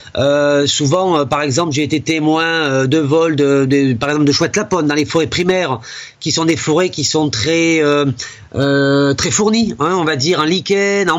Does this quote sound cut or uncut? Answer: uncut